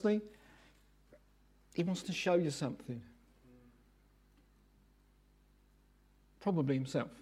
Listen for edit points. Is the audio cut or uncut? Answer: uncut